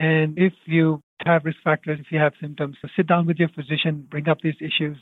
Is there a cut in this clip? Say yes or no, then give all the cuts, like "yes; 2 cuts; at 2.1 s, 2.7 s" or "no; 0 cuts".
no; 0 cuts